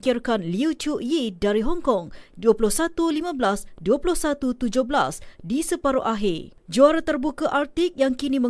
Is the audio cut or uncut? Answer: cut